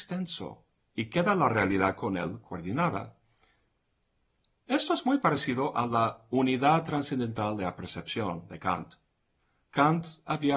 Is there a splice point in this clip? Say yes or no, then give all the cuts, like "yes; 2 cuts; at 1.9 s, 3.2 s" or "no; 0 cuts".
no; 0 cuts